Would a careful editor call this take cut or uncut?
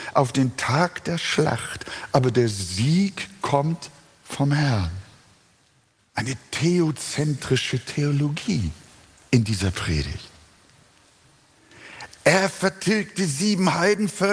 cut